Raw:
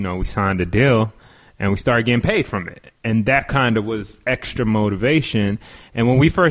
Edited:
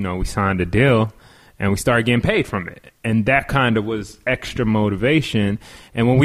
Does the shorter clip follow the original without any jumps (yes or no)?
yes